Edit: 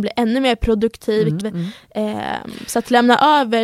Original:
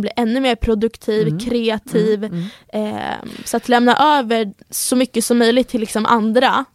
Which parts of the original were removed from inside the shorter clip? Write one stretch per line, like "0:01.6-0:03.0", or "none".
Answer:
0:01.4-0:02.2